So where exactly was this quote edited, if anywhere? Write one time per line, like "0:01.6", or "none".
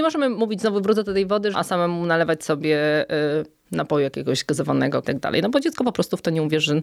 0:01.5
0:05.0

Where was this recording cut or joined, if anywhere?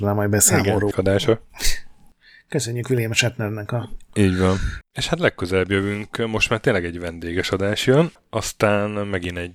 0:00.9
0:04.8

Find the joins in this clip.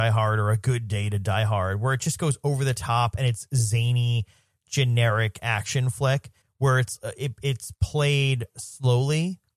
0:06.4

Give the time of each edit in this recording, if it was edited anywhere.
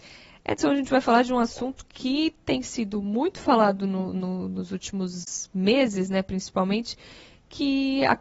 none

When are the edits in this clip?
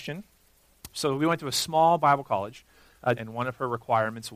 0:00.9
0:03.1

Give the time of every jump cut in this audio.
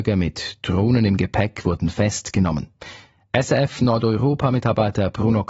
none

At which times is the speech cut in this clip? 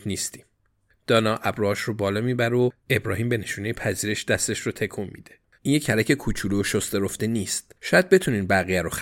0:05.5

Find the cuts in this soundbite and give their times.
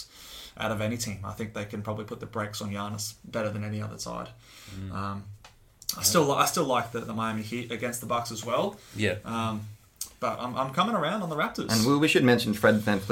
none

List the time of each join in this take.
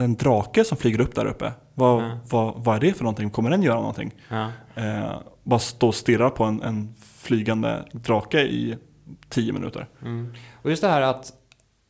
none

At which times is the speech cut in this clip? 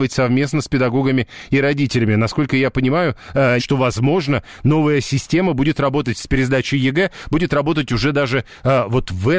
0:03.6

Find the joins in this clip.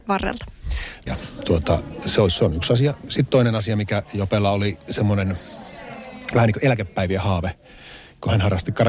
0:01.1

